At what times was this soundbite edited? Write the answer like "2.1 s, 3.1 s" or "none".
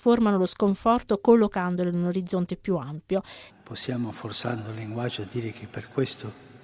3.5 s